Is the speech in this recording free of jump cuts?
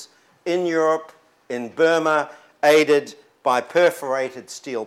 yes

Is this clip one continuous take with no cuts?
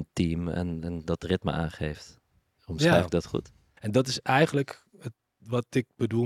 no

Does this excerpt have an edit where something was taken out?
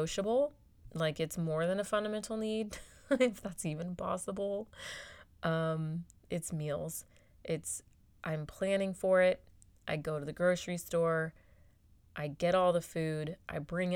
no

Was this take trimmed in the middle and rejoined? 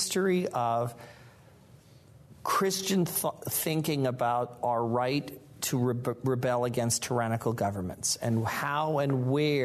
no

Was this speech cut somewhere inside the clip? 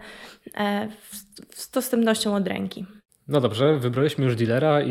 no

